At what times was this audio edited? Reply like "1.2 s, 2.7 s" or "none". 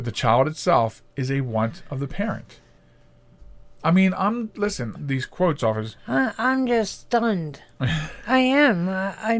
4.9 s